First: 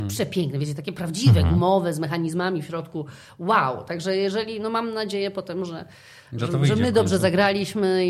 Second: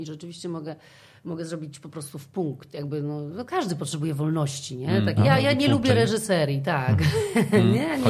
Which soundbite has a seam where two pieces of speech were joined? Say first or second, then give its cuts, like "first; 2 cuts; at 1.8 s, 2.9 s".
second; 1 cut; at 5.2 s